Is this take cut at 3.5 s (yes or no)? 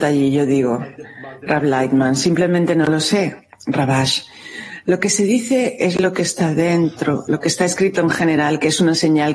no